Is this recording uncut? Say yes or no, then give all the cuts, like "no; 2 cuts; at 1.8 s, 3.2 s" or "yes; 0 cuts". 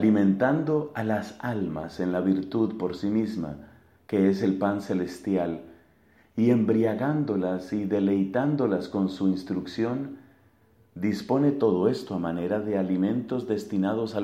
yes; 0 cuts